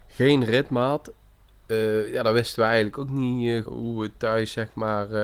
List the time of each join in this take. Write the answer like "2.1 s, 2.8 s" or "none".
3.7 s

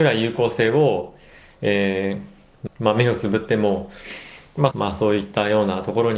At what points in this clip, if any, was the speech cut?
2.7 s, 4.7 s

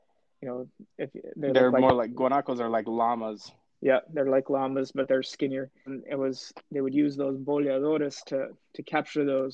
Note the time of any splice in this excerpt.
5.9 s

